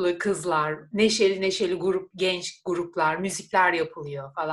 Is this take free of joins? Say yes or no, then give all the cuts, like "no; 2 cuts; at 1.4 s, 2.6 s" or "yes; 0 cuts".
yes; 0 cuts